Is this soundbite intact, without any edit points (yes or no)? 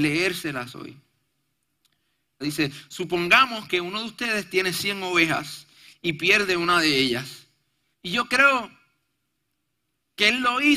no